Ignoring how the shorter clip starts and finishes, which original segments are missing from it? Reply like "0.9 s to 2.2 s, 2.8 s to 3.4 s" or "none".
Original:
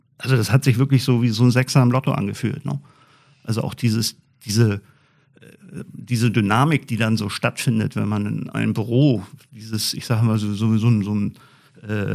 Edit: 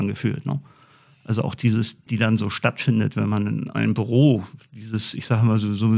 4.3 s to 6.9 s